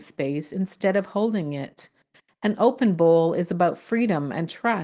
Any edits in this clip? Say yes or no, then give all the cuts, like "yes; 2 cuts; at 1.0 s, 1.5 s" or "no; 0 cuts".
no; 0 cuts